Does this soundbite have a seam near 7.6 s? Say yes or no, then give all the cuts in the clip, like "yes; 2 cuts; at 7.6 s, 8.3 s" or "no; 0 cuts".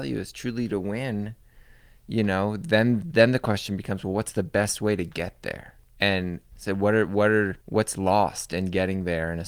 yes; 1 cut; at 7.6 s